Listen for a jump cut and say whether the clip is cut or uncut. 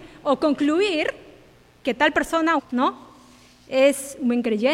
cut